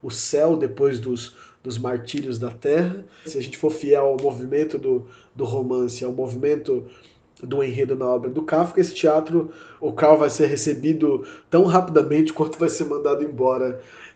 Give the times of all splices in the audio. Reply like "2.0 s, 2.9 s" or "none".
3.3 s, 9.8 s